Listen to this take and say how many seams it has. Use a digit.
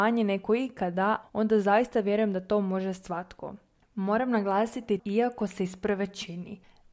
3